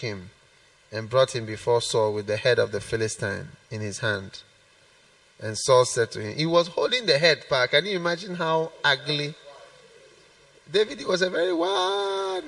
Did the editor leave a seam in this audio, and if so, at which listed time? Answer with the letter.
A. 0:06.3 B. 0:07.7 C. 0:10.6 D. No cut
D